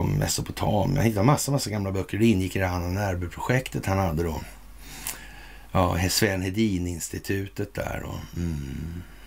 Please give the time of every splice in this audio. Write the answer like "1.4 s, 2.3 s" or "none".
none